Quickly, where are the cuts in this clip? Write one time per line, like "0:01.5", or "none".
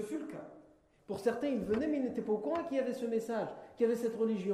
0:01.0